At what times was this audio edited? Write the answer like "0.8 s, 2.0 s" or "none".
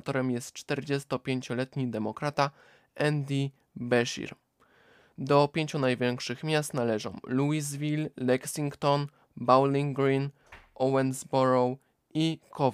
none